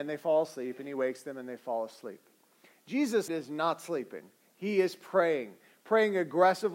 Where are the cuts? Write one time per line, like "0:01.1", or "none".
0:03.3